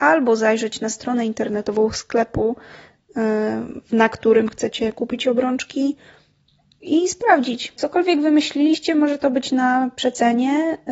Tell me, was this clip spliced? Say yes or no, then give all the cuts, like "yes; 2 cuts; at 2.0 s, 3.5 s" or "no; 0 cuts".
yes; 1 cut; at 7.8 s